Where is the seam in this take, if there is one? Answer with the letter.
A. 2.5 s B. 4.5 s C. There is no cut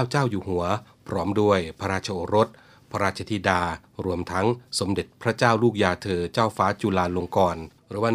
C